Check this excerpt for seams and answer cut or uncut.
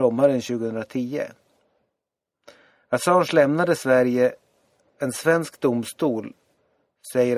uncut